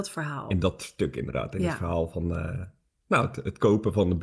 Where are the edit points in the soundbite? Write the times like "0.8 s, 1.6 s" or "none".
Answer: none